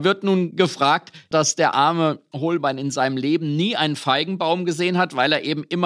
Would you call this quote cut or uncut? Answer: cut